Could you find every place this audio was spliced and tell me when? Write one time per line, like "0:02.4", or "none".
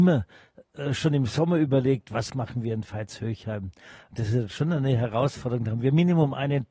none

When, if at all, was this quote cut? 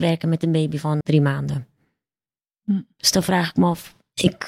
0:01.0

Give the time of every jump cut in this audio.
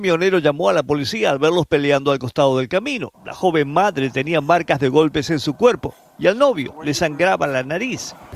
0:03.1

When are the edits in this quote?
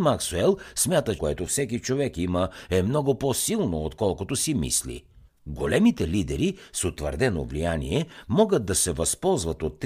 0:01.2
0:05.3

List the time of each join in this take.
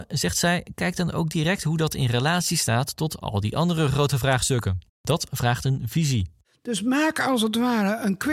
0:04.9

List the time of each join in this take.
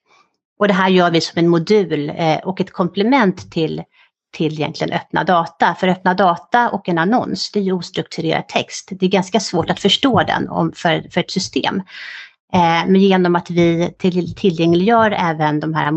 none

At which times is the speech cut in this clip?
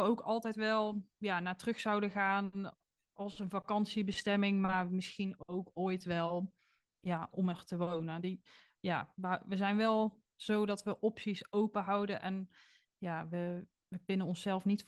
none

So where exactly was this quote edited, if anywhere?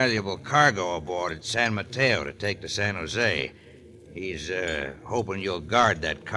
none

